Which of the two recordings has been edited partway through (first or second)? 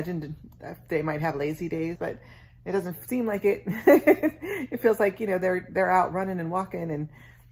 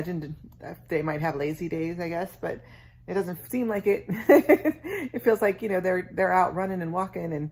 first